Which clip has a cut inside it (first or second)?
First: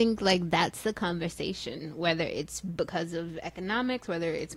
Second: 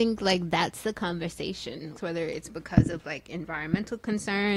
second